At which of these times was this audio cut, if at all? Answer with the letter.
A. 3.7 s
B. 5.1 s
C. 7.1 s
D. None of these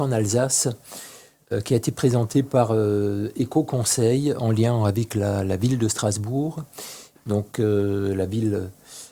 C